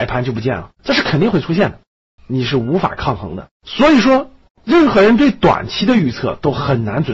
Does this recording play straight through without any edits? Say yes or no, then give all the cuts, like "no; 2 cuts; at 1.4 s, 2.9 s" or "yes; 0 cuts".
no; 2 cuts; at 2.2 s, 3.6 s